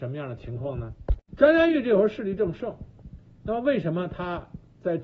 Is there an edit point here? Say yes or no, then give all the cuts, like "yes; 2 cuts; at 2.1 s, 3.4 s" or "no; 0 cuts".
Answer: no; 0 cuts